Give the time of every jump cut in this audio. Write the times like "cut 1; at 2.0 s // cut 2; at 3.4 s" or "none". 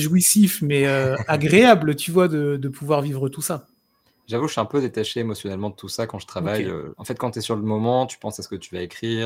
cut 1; at 6.9 s

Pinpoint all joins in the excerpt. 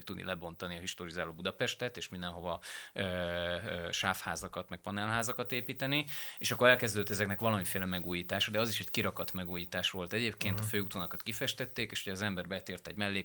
none

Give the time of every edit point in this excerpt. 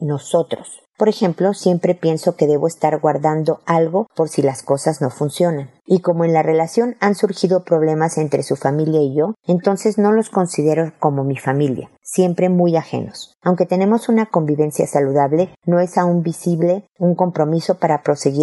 none

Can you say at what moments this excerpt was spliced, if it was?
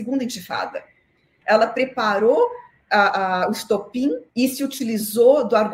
cut 1; at 1.4 s // cut 2; at 4.3 s

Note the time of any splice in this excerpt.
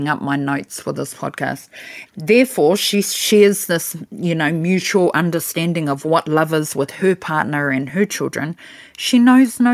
cut 1; at 2.1 s

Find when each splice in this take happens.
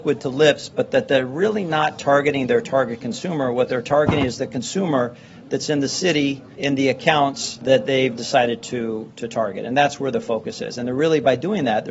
none

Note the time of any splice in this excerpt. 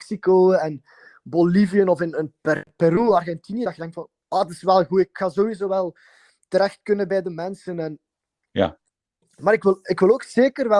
none

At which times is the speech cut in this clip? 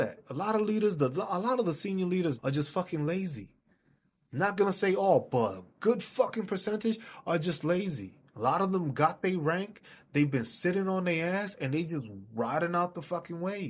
cut 1; at 2.4 s

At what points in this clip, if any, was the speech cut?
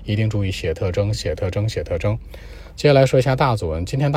none

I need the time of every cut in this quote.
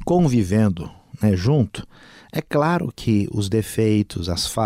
none

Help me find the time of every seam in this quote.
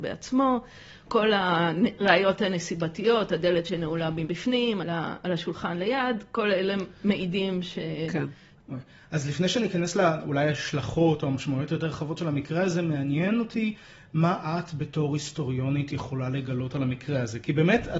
cut 1; at 4.8 s // cut 2; at 8.5 s

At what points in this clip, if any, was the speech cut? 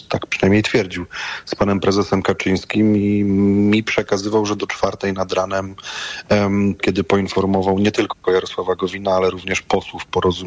cut 1; at 6.8 s

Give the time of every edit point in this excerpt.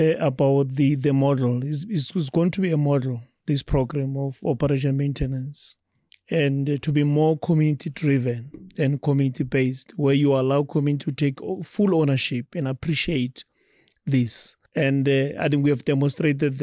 cut 1; at 14.7 s

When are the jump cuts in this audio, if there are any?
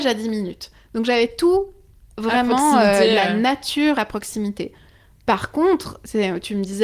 none

